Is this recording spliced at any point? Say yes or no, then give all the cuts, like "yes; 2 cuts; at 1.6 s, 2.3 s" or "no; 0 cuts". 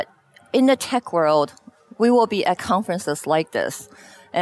no; 0 cuts